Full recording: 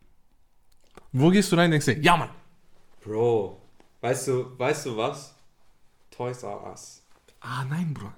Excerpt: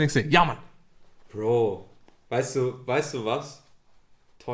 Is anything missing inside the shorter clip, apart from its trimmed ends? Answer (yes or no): no